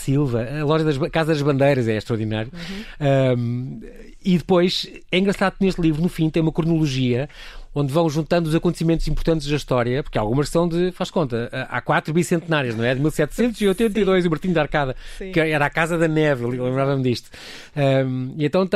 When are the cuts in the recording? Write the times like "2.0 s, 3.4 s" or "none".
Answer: none

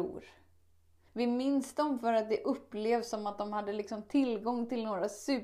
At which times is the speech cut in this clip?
1.1 s

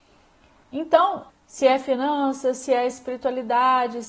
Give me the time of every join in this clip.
1.3 s

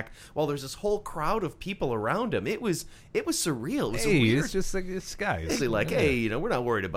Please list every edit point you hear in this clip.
5.6 s

